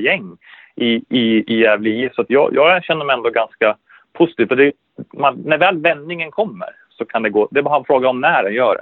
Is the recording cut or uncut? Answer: uncut